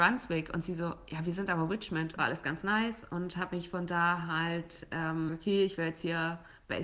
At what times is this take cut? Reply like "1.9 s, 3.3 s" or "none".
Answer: 2.2 s, 5.3 s